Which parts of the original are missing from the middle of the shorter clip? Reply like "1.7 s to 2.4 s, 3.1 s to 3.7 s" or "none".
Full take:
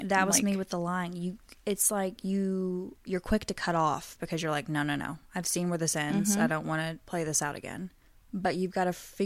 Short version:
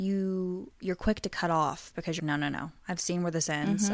4.4 s to 4.7 s